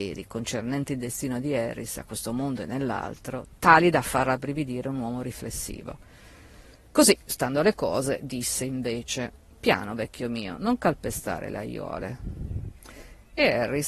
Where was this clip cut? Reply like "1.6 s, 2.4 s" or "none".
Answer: none

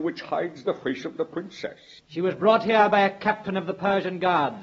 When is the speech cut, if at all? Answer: 2.0 s

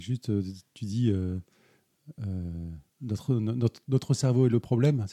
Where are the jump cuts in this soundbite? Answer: 2.9 s

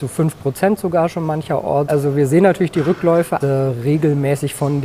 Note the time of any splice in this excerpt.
1.9 s, 3.4 s

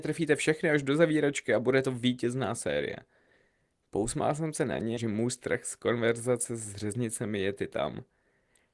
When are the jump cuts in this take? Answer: 5.0 s

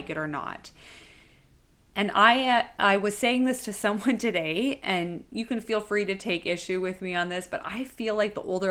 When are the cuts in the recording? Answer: none

